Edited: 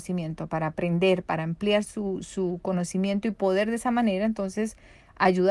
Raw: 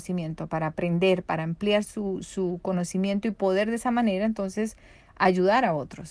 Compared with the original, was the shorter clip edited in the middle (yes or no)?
no